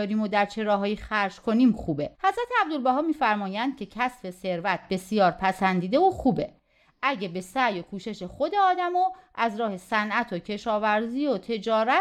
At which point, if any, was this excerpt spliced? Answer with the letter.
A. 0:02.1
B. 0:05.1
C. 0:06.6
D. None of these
A